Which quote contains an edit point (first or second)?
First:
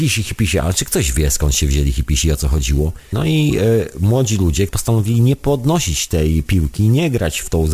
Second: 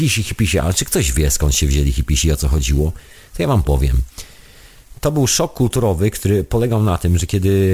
first